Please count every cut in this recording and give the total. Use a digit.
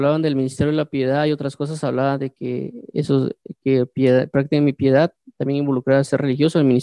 0